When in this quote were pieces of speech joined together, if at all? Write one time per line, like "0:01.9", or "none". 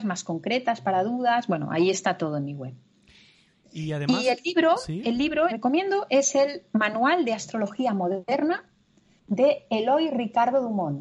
0:05.5

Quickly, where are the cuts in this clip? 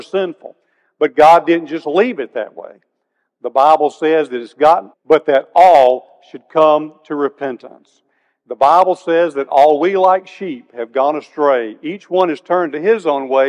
0:04.9

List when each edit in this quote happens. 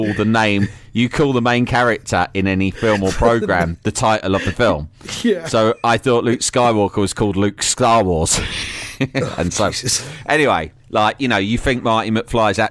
0:10.8

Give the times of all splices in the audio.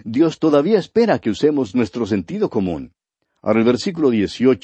none

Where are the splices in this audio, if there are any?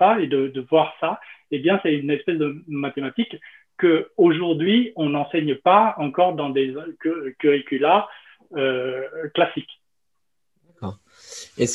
none

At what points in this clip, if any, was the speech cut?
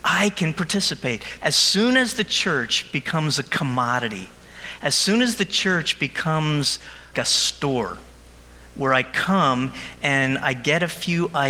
0:01.4
0:07.1

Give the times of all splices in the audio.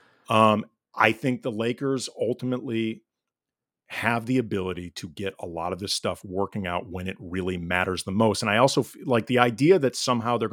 none

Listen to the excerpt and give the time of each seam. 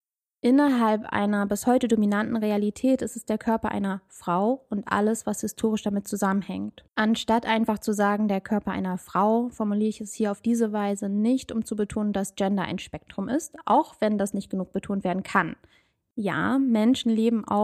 0:06.9

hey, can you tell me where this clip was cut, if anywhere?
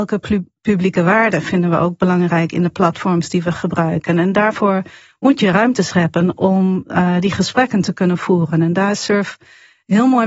none

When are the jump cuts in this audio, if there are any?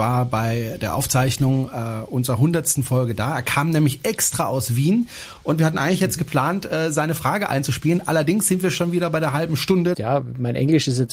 0:09.9

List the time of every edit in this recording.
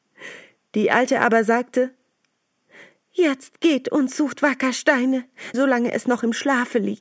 0:05.5

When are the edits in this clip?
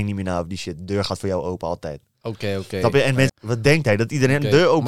0:03.3

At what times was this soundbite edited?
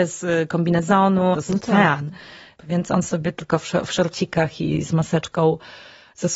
0:01.3

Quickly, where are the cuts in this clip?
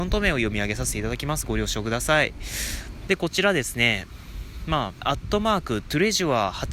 0:03.1
0:05.0

